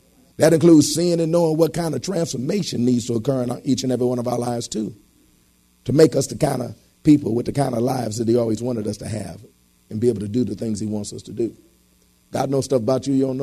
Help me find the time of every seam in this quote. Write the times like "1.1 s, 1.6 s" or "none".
none